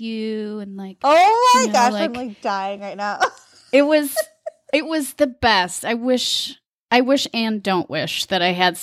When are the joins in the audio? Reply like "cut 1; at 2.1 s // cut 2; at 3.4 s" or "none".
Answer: none